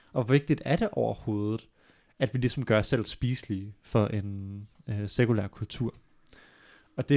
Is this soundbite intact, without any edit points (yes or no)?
yes